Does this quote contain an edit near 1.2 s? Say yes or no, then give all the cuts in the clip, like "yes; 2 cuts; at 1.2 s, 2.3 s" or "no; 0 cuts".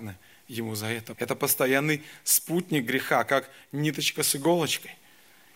yes; 1 cut; at 1.2 s